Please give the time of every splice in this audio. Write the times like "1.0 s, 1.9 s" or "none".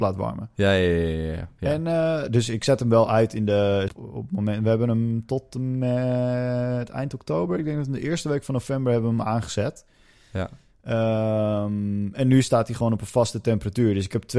3.9 s